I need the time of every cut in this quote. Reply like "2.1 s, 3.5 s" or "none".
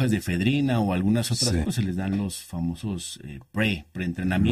1.6 s